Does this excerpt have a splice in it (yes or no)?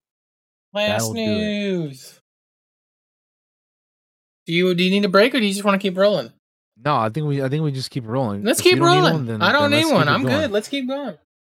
no